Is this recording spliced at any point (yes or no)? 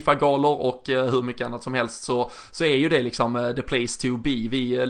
no